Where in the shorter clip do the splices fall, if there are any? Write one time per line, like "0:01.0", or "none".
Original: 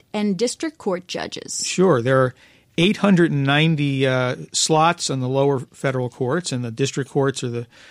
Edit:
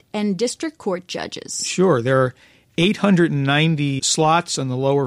0:04.0